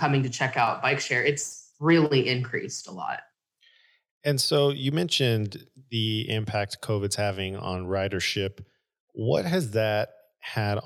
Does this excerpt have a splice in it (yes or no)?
no